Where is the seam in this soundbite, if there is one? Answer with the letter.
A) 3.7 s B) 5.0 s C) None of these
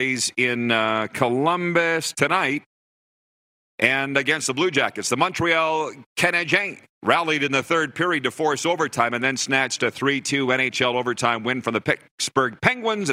C